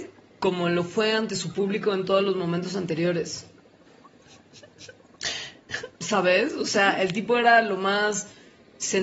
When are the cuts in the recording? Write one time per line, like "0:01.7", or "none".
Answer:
0:06.0